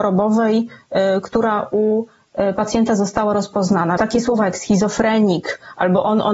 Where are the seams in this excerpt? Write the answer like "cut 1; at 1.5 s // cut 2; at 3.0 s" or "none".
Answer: cut 1; at 4.0 s